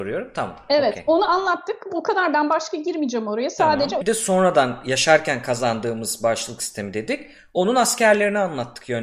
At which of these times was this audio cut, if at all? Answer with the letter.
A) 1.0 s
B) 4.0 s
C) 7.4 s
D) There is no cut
B